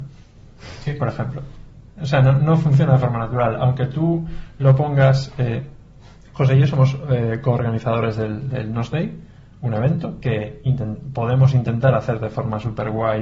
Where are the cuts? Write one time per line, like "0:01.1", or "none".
0:01.9

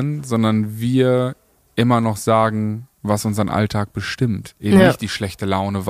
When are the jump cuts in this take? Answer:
none

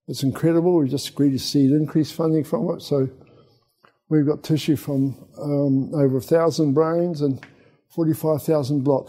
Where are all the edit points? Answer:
none

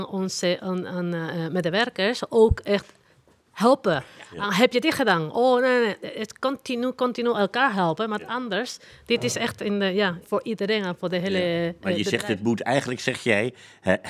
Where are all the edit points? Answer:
0:10.2

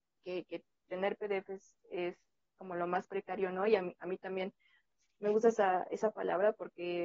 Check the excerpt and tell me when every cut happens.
none

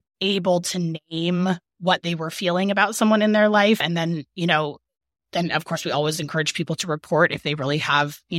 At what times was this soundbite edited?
none

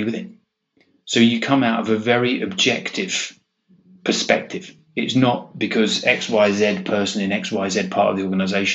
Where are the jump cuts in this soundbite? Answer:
none

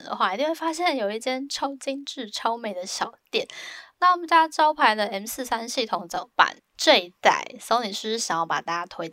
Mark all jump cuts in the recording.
0:03.9
0:06.6

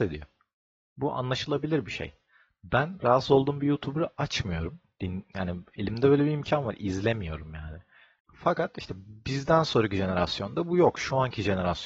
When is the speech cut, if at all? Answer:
0:08.2

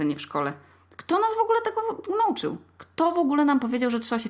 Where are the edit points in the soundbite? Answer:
none

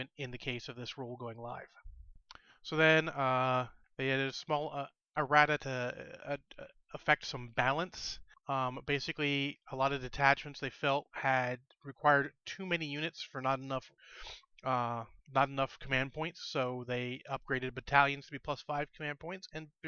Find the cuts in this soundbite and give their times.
none

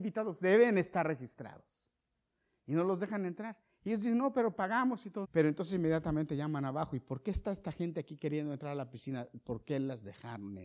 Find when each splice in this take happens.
0:05.2

